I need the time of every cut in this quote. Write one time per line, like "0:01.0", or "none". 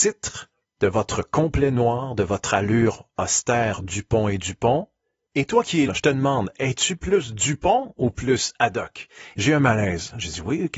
0:05.9
0:09.3